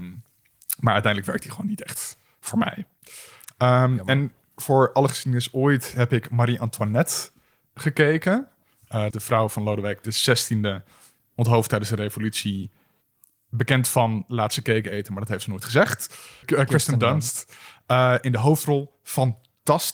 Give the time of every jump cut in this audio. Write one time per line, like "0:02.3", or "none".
0:09.1
0:16.4